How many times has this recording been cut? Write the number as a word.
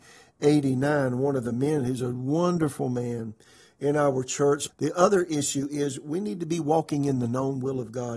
one